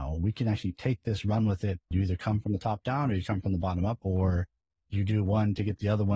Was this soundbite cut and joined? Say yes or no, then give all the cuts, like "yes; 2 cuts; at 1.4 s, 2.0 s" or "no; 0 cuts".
yes; 2 cuts; at 1.9 s, 4.0 s